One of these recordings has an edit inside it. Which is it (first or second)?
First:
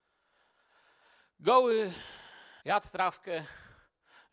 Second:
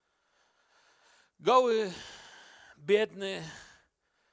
first